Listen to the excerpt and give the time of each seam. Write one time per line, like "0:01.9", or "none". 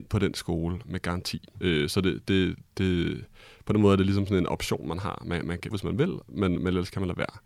0:01.5
0:05.7